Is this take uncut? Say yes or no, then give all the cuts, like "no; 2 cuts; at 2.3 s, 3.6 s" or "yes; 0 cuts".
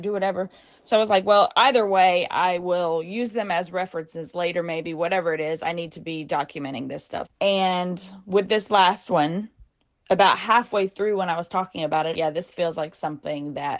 no; 2 cuts; at 7.3 s, 12.1 s